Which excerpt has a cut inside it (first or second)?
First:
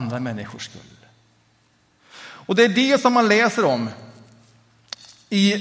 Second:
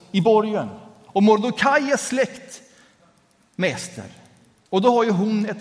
second